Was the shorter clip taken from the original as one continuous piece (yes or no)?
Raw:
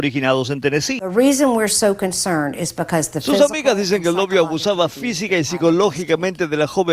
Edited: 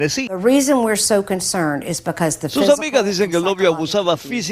yes